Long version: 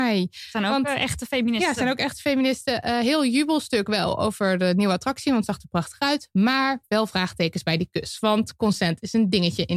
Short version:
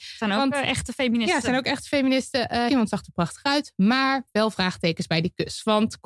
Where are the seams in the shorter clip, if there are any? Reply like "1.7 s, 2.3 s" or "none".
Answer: 2.7 s